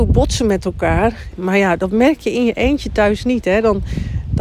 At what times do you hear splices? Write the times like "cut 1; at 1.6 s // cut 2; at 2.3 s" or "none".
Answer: cut 1; at 1.3 s